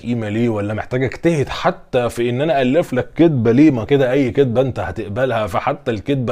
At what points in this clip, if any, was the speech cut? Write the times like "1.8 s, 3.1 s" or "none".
3.9 s

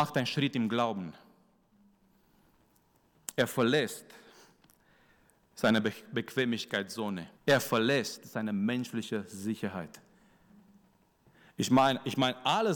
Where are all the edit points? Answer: 7.4 s

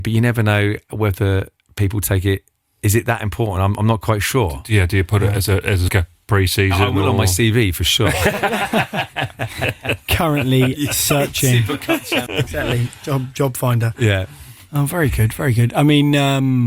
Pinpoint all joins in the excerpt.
5.9 s, 12.3 s

